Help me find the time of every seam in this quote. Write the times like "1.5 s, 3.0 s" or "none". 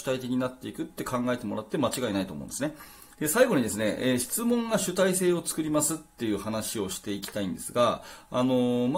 3.1 s